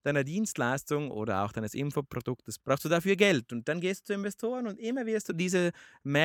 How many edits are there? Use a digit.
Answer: 1